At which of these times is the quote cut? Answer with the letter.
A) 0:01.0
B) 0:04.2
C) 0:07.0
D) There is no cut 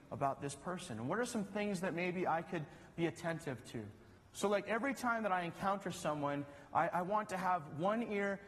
B